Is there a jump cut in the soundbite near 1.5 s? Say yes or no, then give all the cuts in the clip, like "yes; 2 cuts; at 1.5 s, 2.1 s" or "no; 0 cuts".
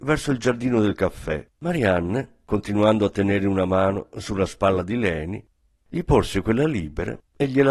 yes; 1 cut; at 1.5 s